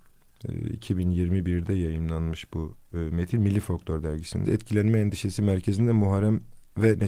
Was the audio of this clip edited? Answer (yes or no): yes